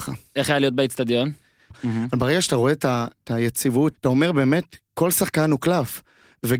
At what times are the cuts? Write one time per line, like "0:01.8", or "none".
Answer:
0:01.7
0:03.9